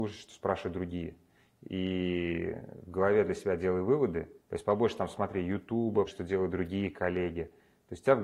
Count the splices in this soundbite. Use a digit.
2